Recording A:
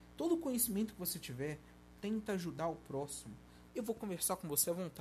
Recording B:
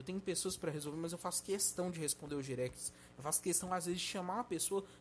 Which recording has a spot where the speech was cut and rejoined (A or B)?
A